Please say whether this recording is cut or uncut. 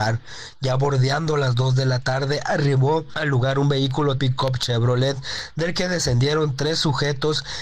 cut